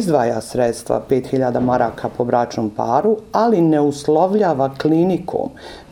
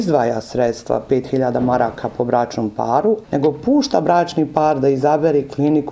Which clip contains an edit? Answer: second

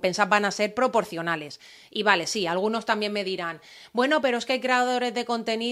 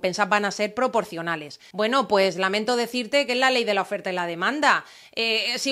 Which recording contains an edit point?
second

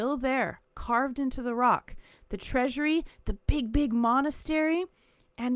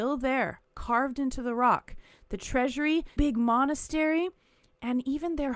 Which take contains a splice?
second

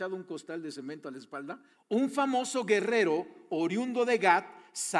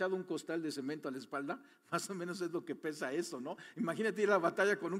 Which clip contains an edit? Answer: first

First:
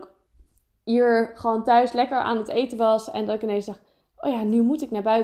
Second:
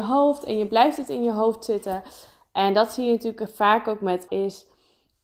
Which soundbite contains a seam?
second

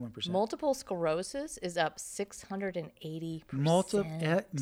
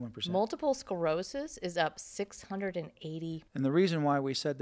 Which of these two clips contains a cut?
second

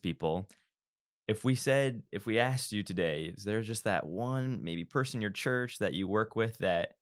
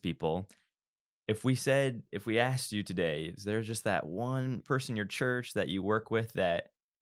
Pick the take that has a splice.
second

